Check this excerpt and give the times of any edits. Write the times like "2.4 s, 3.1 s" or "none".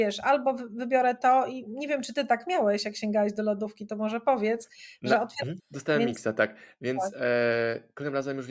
5.6 s